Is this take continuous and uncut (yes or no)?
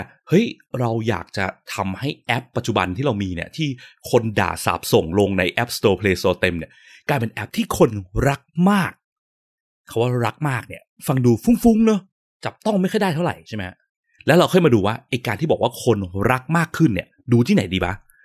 yes